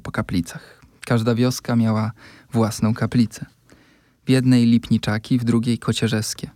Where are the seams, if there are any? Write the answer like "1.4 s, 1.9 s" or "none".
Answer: none